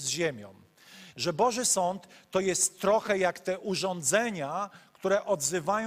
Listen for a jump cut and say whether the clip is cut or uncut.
cut